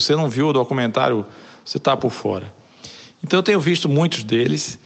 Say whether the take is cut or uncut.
uncut